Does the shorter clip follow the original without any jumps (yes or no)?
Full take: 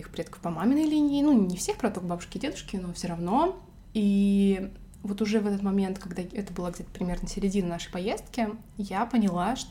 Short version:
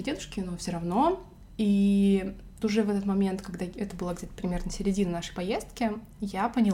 no